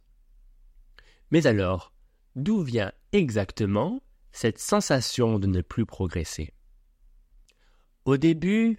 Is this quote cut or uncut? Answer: uncut